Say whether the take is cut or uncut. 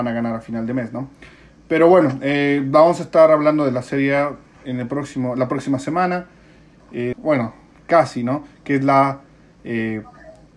cut